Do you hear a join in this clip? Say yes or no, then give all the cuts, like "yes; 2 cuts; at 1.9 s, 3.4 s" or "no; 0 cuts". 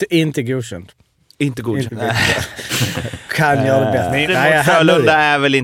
yes; 2 cuts; at 1.9 s, 4.3 s